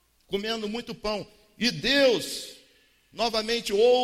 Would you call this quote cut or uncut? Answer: uncut